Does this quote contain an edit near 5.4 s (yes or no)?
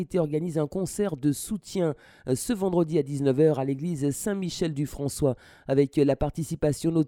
no